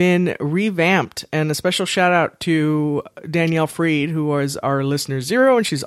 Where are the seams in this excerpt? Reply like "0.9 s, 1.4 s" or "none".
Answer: none